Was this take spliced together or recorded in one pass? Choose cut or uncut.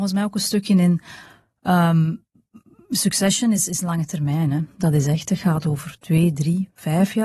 uncut